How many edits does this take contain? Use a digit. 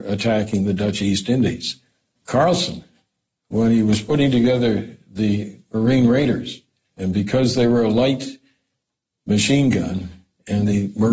2